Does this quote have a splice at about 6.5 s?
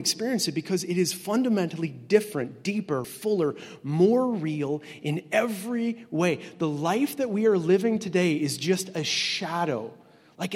no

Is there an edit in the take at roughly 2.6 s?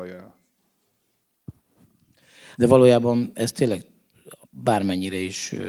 yes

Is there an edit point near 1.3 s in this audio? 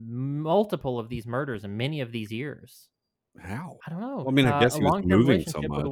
no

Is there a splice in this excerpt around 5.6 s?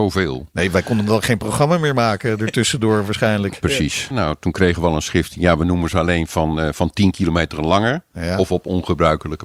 no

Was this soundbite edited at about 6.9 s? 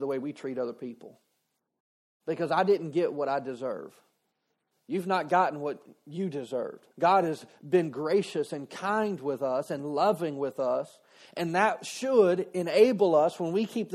yes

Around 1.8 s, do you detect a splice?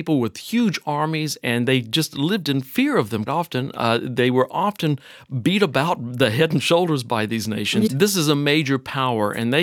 no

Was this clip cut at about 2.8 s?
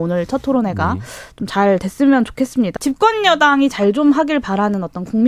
yes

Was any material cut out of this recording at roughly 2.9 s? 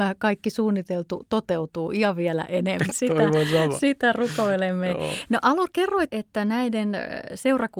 yes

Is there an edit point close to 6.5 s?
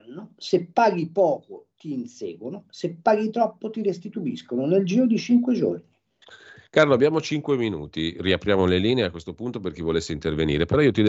no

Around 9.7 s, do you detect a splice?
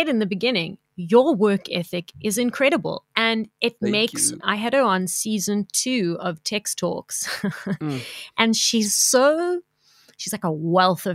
no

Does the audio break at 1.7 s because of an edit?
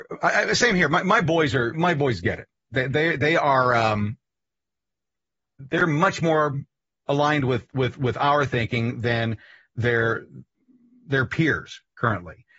yes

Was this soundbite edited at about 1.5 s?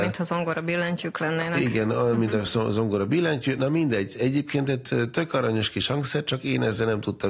no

